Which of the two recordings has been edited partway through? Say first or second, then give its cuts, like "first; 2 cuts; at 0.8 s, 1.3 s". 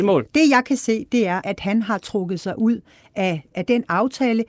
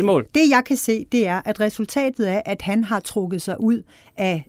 first; 2 cuts; at 1.4 s, 3.5 s